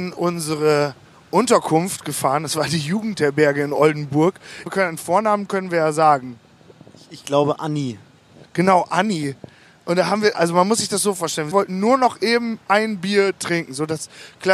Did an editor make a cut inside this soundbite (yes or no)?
yes